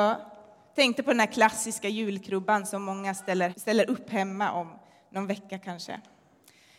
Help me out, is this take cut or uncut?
cut